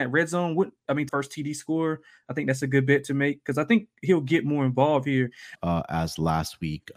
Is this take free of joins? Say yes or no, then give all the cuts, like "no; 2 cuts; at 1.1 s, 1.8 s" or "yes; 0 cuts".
no; 2 cuts; at 1.1 s, 5.6 s